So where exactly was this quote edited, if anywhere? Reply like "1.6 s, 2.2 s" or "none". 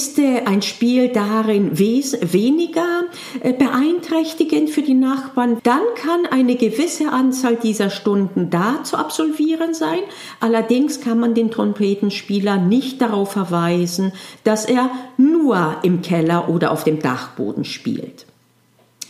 5.6 s